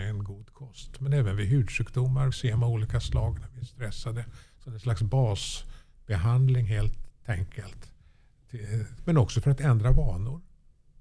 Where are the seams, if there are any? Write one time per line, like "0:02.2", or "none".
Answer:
0:02.3
0:09.0